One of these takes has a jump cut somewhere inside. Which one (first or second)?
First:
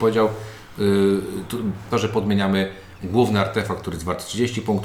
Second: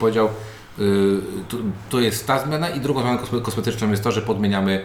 first